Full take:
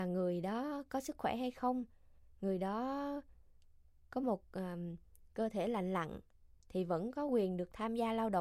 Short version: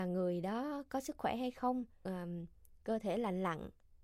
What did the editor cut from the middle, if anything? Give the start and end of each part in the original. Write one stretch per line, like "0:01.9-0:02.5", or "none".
0:02.0-0:04.6

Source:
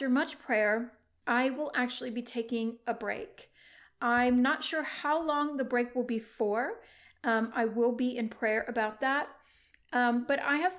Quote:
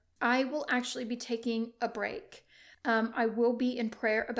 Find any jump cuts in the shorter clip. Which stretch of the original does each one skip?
0:03.8-0:07.1

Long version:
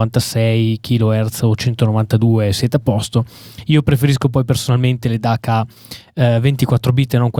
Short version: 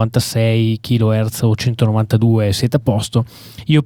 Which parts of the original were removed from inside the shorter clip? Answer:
none

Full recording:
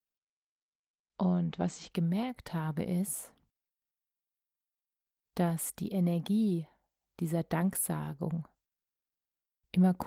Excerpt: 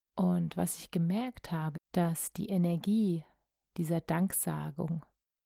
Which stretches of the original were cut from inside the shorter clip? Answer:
0:02.8-0:05.2

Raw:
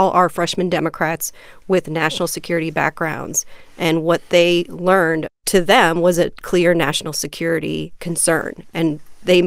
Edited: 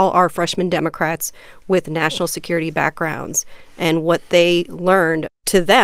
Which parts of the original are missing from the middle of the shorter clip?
none

